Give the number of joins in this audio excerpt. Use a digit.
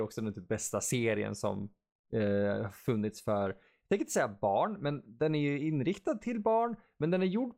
0